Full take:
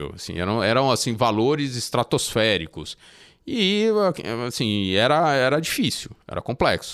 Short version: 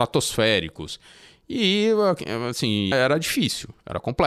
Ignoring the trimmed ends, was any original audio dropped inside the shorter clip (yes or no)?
yes